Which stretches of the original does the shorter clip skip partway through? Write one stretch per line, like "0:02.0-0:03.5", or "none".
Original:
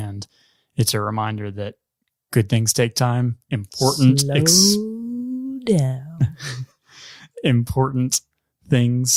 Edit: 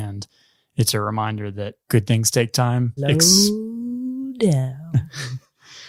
0:01.8-0:02.2
0:03.4-0:04.2